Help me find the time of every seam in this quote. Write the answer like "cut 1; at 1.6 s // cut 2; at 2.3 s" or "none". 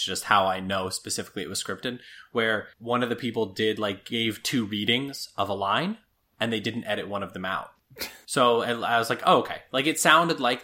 cut 1; at 2.7 s